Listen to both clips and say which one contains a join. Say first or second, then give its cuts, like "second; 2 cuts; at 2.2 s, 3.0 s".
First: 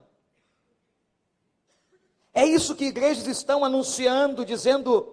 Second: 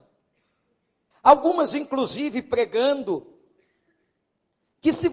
second; 1 cut; at 1.1 s